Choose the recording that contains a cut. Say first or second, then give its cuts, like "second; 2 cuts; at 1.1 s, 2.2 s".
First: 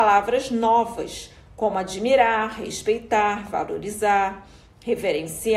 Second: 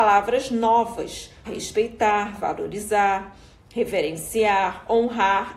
second; 1 cut; at 1.5 s